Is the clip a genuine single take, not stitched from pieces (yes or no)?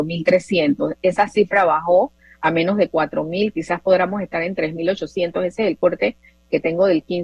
yes